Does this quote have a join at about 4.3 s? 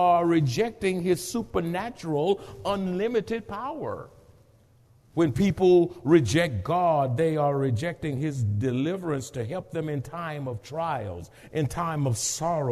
no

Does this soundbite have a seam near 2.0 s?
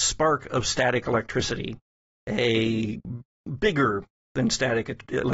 no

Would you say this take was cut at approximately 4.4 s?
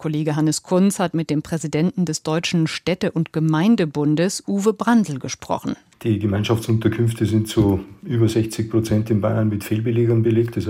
no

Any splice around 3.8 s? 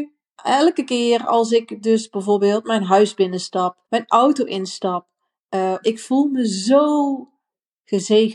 yes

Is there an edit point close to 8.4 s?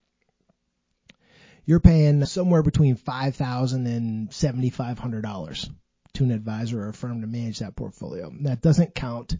no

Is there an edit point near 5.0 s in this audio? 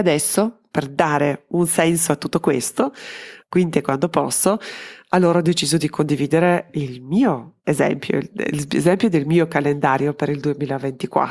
no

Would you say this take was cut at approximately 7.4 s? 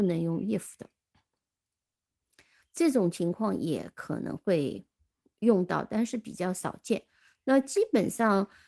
no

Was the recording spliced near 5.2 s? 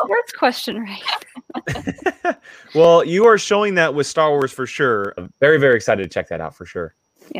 yes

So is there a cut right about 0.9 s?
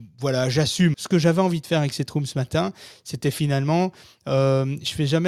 yes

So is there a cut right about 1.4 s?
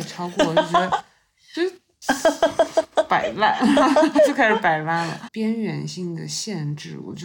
no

